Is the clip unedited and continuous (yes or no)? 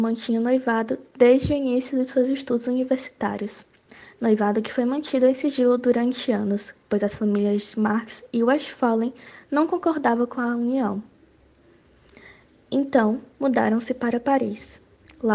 no